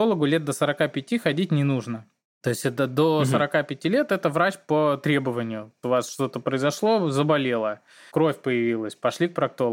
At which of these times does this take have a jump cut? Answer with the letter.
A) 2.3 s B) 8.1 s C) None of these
B